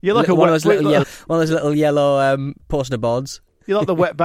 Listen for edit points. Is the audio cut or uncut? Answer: cut